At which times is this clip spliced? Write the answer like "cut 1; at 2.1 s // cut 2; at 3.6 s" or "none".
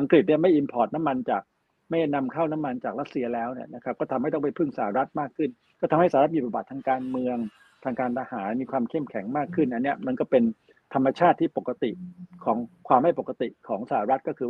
none